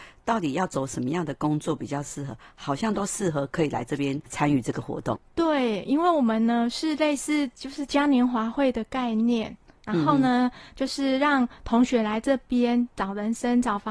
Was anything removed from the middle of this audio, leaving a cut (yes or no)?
no